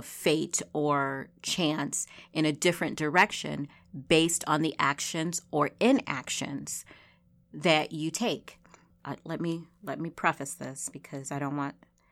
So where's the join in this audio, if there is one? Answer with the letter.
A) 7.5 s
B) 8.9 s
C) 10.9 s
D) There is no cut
B